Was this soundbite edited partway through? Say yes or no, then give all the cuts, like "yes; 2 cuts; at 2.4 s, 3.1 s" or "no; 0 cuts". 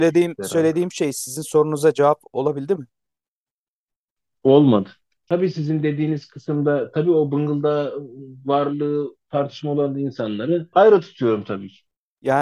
yes; 1 cut; at 5.3 s